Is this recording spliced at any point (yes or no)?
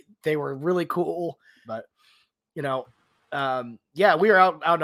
yes